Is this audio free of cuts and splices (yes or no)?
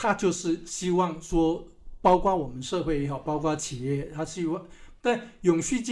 no